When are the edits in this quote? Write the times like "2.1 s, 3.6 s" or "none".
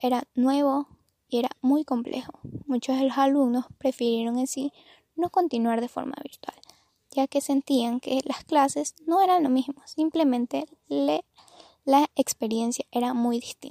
none